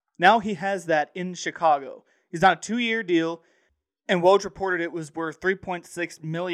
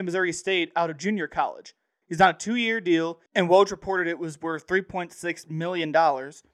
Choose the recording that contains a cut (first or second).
second